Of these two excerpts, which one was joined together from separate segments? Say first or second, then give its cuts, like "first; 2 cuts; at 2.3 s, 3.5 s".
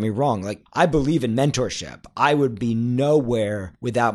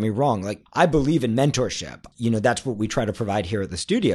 second; 1 cut; at 2.1 s